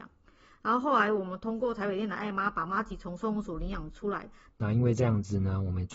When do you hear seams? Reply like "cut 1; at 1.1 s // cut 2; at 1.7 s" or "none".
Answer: cut 1; at 4.5 s